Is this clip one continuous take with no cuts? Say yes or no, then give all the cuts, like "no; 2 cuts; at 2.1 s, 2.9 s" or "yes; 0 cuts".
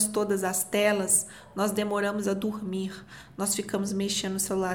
yes; 0 cuts